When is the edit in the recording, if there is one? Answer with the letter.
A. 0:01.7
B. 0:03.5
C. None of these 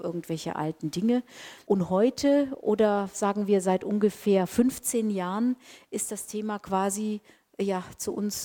C